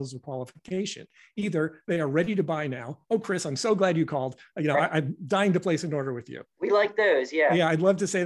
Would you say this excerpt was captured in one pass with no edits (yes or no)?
yes